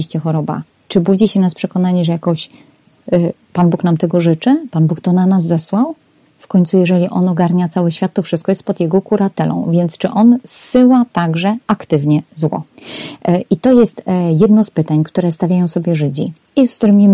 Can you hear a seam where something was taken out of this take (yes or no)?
no